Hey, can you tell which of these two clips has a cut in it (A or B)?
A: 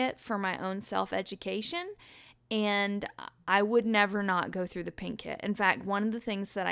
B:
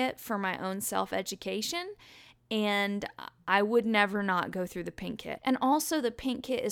B